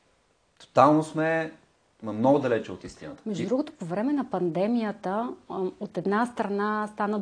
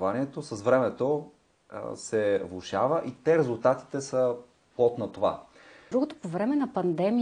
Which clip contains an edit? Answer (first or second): second